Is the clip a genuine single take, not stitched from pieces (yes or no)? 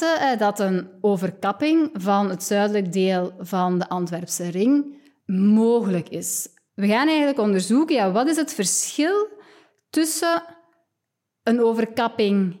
yes